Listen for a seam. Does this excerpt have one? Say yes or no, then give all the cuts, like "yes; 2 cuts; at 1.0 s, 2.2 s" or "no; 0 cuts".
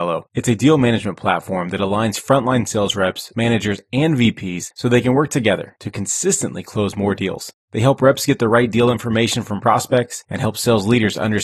yes; 1 cut; at 10.2 s